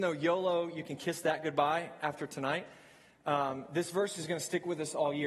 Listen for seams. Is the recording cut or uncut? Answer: uncut